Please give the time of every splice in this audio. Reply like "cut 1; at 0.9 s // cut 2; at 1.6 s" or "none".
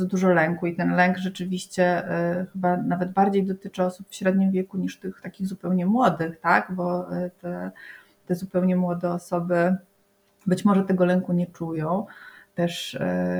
none